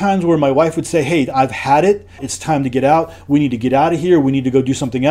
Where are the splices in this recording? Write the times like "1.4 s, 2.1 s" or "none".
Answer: 2.2 s